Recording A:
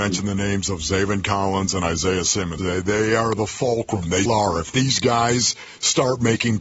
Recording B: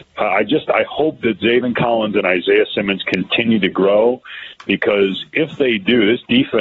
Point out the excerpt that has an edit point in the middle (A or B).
A